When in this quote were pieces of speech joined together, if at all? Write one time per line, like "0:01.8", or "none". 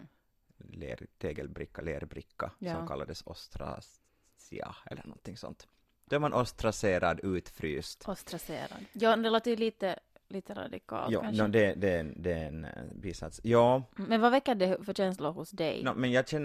none